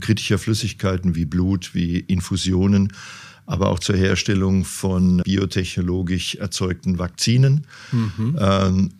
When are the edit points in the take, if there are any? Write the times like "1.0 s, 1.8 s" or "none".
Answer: 5.2 s